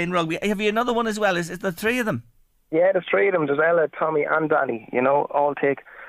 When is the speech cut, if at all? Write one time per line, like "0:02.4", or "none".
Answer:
none